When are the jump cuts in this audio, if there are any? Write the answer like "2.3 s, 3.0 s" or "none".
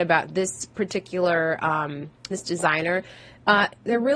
2.3 s